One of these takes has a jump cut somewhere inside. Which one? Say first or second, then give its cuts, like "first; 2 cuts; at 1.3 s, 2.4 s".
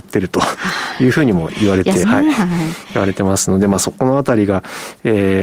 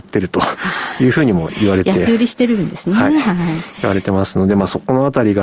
first; 1 cut; at 2.0 s